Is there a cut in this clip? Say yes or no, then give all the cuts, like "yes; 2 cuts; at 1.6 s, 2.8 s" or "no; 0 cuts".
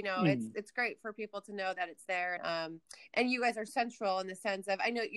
yes; 2 cuts; at 2.4 s, 3.7 s